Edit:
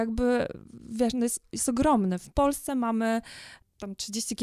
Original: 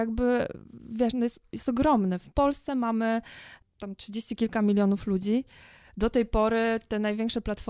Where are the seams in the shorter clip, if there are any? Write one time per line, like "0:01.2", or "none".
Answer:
none